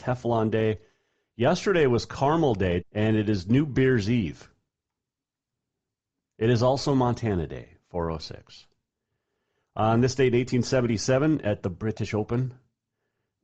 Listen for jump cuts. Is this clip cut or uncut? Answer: cut